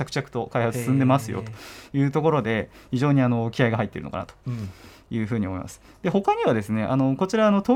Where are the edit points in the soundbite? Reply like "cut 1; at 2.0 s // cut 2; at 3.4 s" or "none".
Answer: none